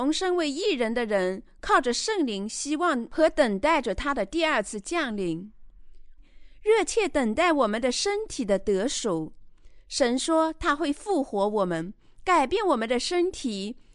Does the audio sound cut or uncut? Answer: cut